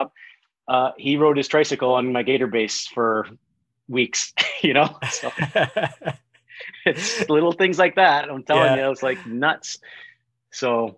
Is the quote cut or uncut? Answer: uncut